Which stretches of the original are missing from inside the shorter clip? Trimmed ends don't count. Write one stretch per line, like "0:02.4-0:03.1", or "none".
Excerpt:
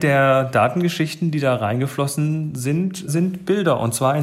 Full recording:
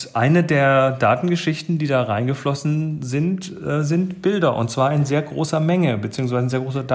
0:03.5-0:03.8